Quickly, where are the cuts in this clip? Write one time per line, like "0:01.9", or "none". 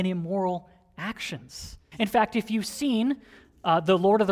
0:01.9